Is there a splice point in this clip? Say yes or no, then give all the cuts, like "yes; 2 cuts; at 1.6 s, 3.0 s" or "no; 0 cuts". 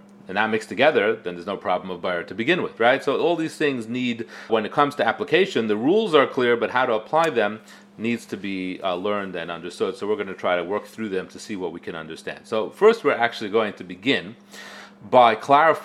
yes; 2 cuts; at 2.8 s, 4.5 s